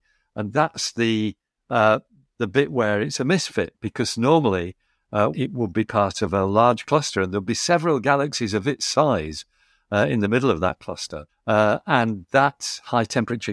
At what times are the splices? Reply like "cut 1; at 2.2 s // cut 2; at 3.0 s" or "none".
cut 1; at 5.3 s // cut 2; at 11.3 s